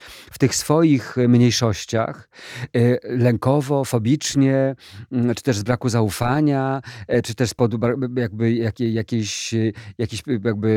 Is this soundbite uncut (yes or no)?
yes